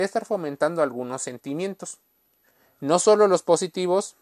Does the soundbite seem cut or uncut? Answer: uncut